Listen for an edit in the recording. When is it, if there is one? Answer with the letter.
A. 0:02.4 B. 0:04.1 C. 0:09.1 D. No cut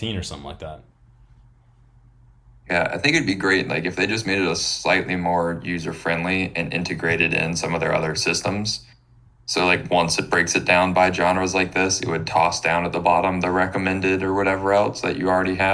D